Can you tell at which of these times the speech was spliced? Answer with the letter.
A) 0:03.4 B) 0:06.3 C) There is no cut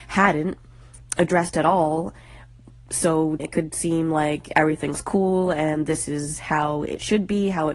A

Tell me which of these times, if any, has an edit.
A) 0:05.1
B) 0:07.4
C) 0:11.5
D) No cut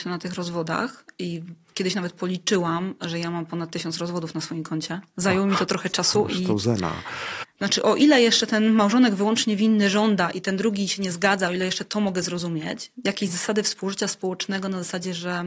B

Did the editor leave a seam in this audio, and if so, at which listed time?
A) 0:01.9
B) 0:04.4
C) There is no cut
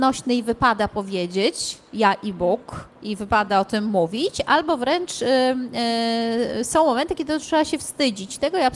C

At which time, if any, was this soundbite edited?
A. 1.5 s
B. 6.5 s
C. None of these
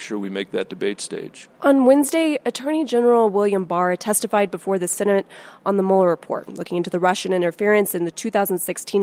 A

